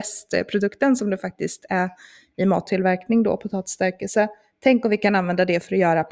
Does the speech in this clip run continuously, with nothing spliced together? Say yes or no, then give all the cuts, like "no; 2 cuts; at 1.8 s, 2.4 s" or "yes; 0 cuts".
yes; 0 cuts